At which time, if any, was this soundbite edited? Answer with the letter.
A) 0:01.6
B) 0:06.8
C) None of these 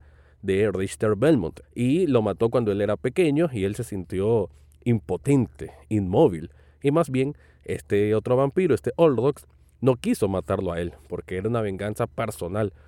A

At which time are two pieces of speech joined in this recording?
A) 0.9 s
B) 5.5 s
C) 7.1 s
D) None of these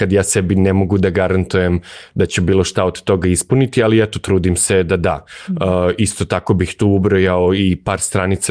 D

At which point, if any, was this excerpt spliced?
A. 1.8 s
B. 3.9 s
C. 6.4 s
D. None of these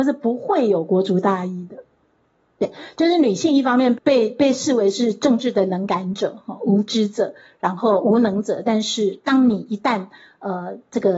B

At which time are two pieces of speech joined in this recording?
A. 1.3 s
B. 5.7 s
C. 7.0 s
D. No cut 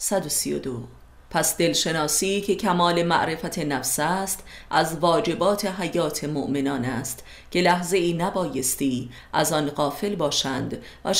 A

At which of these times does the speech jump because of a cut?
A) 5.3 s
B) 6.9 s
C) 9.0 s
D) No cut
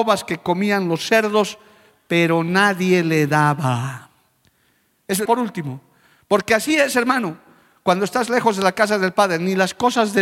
A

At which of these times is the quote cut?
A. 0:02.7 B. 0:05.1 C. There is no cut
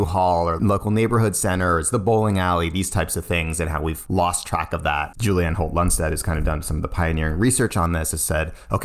B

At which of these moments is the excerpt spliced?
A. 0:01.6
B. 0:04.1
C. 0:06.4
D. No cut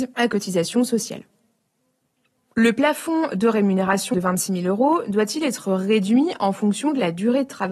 B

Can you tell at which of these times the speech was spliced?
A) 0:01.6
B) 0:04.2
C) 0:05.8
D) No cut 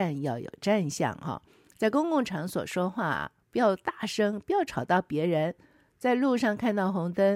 D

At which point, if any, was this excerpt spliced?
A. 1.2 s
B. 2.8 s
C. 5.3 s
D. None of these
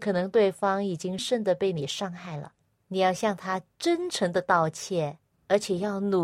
A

